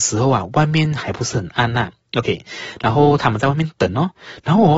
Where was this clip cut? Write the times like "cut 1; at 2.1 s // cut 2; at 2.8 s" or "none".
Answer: none